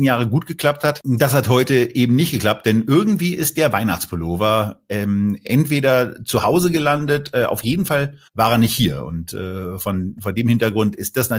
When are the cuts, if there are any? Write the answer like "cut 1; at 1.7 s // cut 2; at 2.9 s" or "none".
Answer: cut 1; at 8.3 s